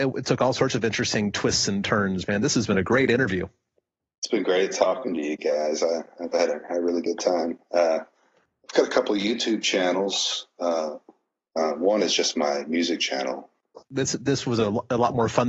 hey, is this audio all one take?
no; 1 cut; at 13.8 s

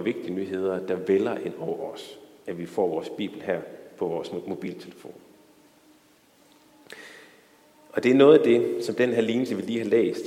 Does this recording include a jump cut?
no; 0 cuts

